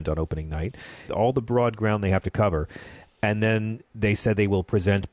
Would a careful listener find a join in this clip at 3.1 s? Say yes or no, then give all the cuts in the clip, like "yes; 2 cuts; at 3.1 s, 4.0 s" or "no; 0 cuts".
no; 1 cut; at 1.1 s